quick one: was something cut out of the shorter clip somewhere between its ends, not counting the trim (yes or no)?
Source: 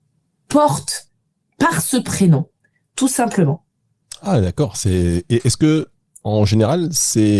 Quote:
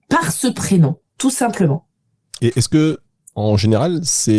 yes